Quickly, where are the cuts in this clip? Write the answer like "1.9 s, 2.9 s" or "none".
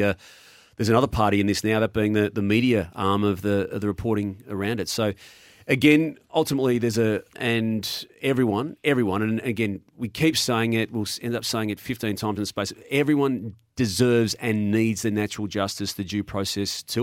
7.3 s